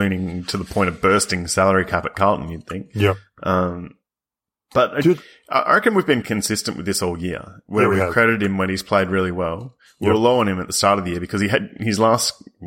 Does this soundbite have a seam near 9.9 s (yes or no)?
no